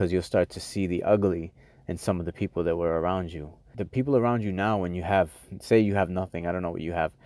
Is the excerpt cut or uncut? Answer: cut